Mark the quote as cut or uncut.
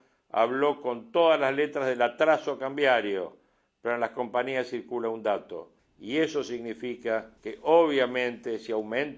cut